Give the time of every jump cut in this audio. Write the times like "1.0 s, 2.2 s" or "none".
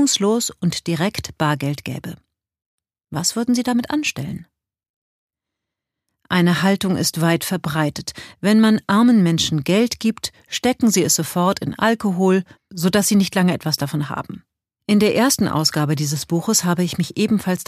12.6 s, 14.8 s